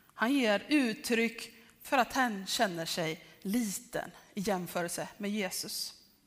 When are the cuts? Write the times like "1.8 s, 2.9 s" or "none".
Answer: none